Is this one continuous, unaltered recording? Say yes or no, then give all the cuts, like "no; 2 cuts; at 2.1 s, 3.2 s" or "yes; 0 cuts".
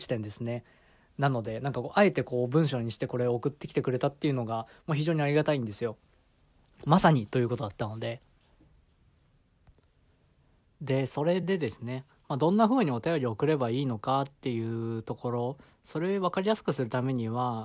yes; 0 cuts